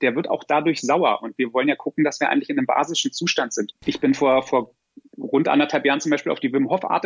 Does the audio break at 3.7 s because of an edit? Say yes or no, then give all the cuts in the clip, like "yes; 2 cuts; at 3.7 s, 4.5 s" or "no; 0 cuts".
yes; 1 cut; at 3.7 s